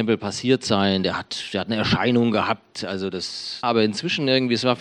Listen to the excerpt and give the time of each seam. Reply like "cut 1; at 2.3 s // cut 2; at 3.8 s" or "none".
cut 1; at 3.6 s